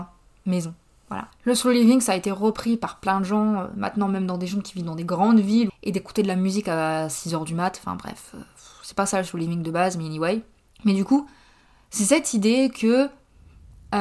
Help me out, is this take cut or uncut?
cut